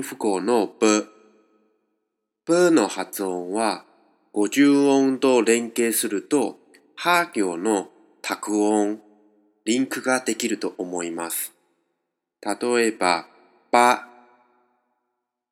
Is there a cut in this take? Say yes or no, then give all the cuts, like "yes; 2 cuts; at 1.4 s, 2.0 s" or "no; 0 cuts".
no; 0 cuts